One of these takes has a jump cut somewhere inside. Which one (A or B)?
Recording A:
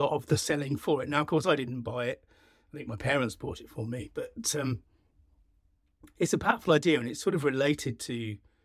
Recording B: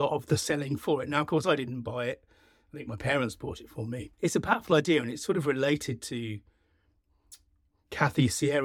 B